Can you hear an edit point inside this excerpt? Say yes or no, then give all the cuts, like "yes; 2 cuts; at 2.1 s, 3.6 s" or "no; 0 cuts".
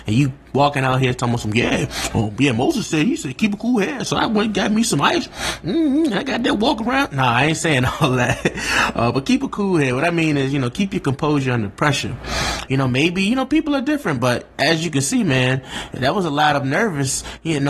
yes; 1 cut; at 12.7 s